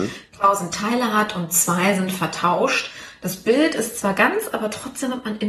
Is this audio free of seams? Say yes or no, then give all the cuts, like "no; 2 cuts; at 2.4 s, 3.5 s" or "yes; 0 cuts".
yes; 0 cuts